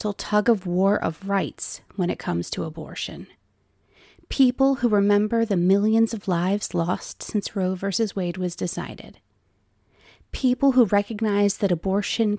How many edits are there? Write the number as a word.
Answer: zero